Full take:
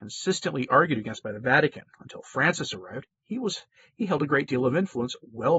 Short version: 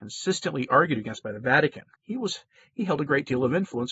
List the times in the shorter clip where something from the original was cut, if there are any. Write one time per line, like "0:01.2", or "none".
0:01.9

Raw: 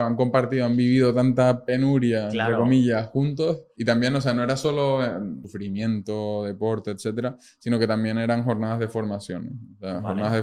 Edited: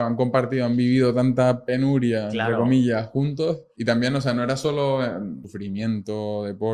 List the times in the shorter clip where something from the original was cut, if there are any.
none

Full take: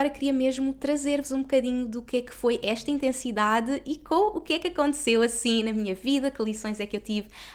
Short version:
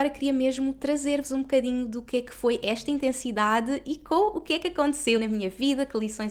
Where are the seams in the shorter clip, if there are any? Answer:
0:05.2

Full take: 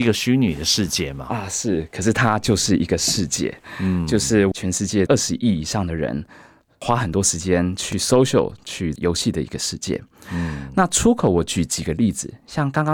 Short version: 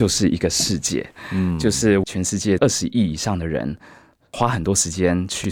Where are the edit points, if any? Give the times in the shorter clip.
none

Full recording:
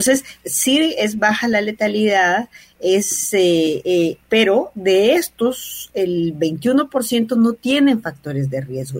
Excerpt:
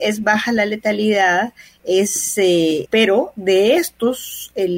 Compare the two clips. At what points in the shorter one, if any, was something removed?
0:02.9

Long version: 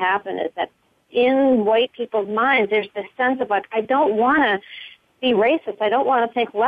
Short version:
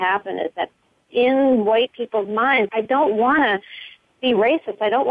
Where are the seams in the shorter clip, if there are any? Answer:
0:02.7

